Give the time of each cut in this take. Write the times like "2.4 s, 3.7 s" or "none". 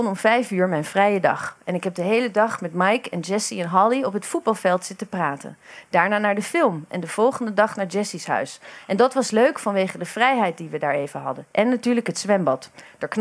none